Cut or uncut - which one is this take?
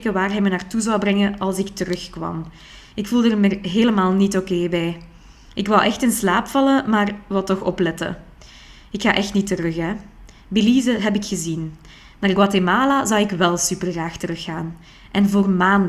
uncut